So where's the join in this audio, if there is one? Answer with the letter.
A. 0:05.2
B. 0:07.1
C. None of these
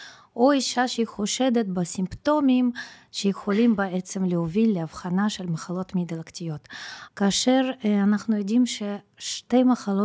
B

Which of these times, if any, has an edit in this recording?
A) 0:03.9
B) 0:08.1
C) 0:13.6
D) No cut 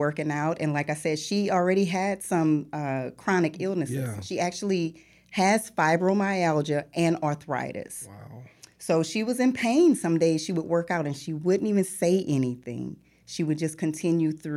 D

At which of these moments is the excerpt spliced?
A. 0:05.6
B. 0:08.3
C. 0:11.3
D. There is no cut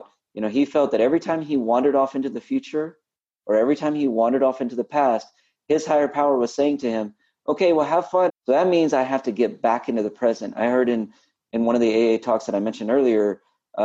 B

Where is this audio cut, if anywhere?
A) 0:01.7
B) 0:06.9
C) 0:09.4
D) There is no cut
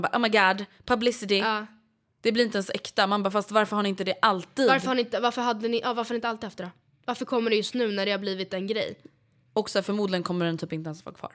D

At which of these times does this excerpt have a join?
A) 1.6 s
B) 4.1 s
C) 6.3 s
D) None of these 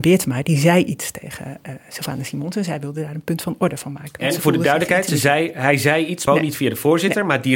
C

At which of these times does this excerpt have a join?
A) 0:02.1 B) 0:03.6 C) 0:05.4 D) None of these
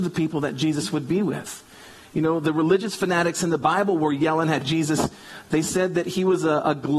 D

